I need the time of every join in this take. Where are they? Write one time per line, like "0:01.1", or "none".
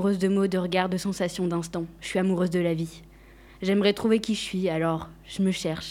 none